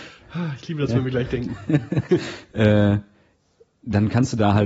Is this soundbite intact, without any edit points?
yes; 0 cuts

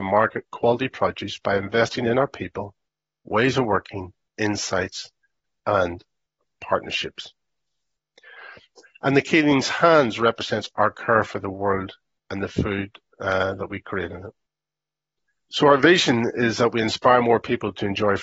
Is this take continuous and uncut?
no; 1 cut; at 8.9 s

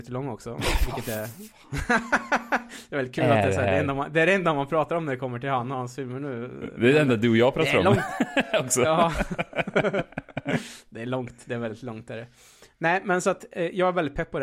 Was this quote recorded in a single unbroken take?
yes; 0 cuts

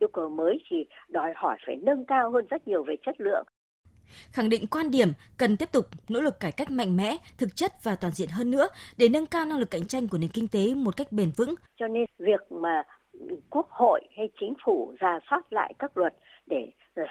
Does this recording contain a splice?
yes; 1 cut; at 11.7 s

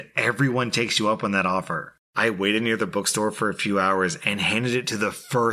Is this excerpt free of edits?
no; 1 cut; at 2.0 s

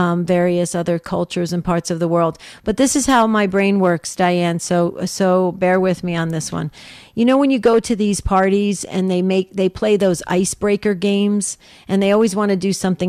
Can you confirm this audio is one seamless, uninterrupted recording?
yes; 0 cuts

